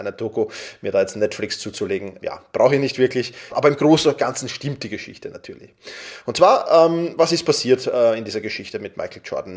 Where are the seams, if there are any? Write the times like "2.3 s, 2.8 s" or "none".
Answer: 2.2 s, 3.5 s